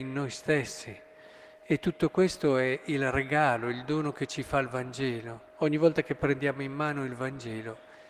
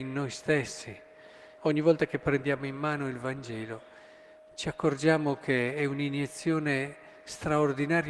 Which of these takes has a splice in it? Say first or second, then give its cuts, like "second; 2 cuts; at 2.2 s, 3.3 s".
second; 1 cut; at 1.6 s